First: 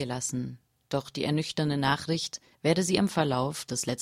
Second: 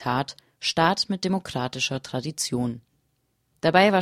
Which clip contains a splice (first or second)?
first